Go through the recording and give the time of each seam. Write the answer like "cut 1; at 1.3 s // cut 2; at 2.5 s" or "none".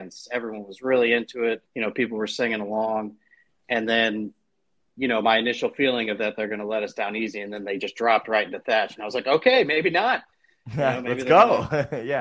cut 1; at 1.7 s